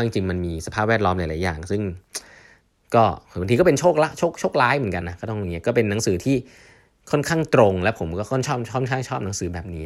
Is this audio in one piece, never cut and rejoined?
no; 1 cut; at 5.0 s

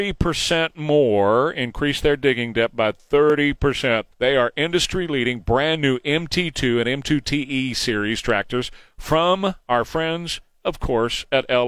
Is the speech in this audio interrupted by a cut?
yes; 1 cut; at 4.1 s

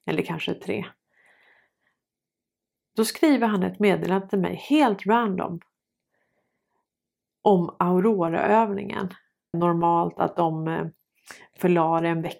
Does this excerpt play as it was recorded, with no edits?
no; 1 cut; at 9.5 s

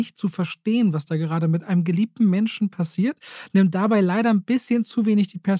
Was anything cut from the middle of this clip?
no; 0 cuts

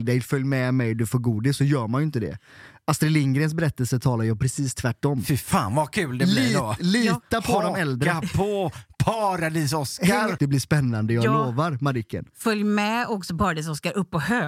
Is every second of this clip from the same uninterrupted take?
no; 1 cut; at 10.4 s

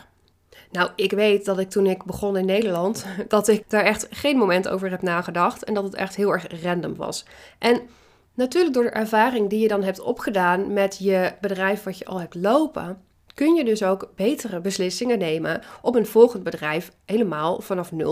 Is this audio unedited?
no; 1 cut; at 3.6 s

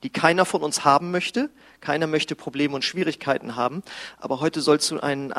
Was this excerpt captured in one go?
yes; 0 cuts

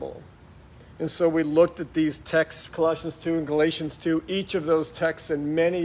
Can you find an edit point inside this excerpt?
yes; 1 cut; at 2.7 s

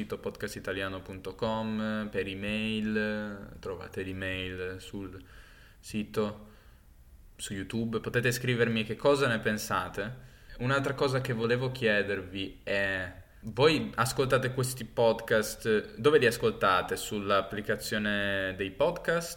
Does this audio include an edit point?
no; 0 cuts

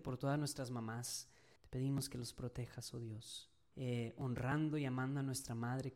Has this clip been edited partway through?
yes; 2 cuts; at 1.6 s, 3.7 s

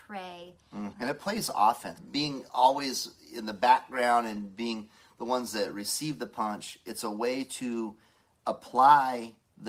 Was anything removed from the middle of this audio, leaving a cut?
yes; 2 cuts; at 0.9 s, 2.0 s

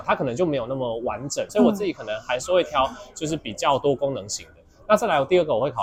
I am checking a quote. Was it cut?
yes; 1 cut; at 1.5 s

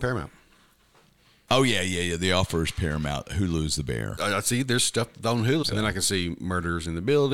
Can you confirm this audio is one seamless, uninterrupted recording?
no; 2 cuts; at 4.2 s, 5.6 s

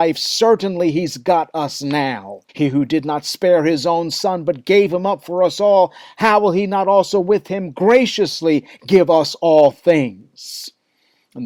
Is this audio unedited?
no; 1 cut; at 2.5 s

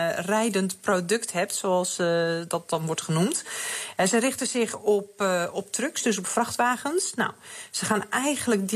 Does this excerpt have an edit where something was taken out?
no; 0 cuts

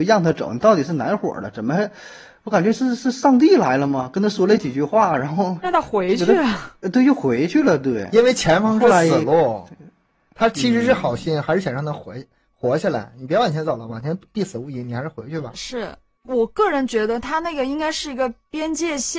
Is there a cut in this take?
no; 0 cuts

